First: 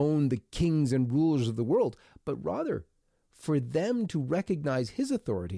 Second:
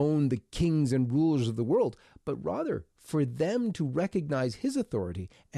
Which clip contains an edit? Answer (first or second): second